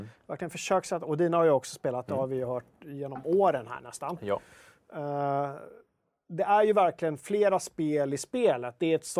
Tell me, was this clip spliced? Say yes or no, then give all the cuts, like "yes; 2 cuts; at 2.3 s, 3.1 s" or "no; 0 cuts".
no; 0 cuts